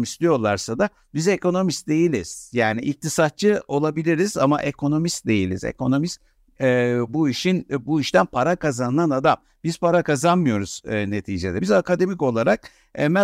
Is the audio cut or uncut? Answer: uncut